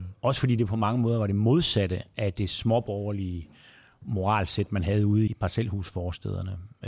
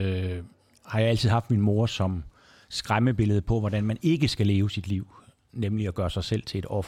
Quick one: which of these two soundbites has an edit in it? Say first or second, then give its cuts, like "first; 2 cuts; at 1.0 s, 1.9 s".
first; 1 cut; at 5.3 s